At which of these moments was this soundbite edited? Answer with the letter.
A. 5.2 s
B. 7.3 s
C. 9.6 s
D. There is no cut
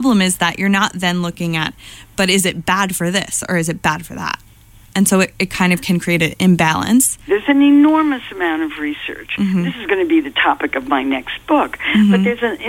B